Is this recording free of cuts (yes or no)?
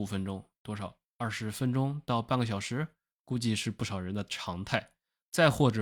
yes